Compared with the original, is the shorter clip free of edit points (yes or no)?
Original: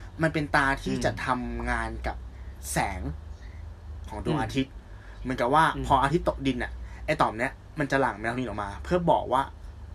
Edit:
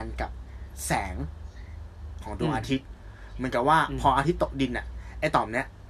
yes